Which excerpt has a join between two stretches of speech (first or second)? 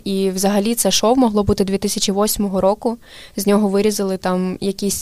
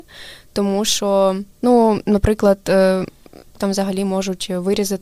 second